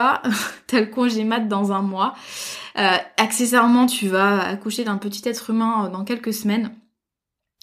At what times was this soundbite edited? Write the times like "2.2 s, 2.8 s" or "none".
none

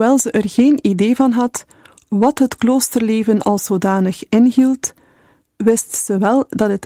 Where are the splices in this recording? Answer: none

